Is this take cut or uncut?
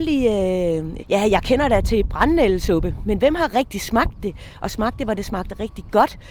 cut